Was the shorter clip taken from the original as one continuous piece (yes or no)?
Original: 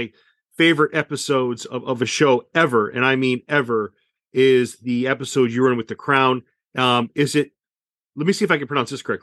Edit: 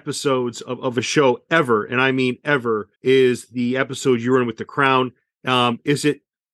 no